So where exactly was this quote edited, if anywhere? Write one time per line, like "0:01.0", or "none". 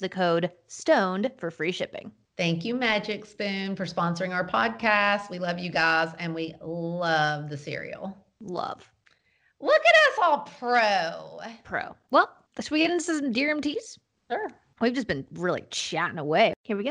none

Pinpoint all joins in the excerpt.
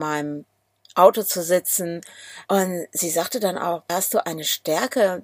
0:02.5
0:03.9

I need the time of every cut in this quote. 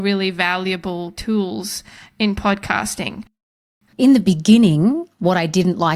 0:03.9

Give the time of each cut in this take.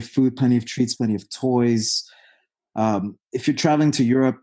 0:00.9
0:03.2

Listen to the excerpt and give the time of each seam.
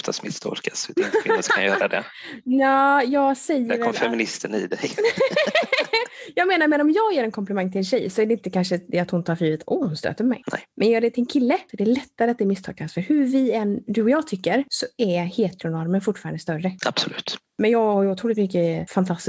none

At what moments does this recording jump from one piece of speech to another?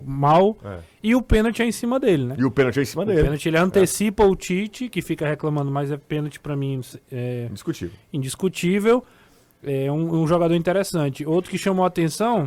0:01.0

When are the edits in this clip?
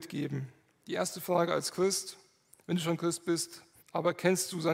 0:03.8

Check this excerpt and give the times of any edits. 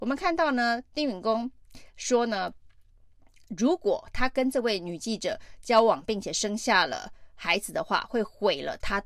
none

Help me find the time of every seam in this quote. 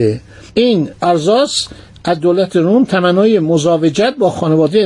0:01.0

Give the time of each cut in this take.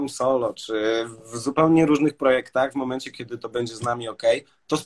none

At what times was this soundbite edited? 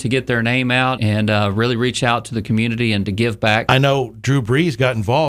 0:01.0
0:03.7

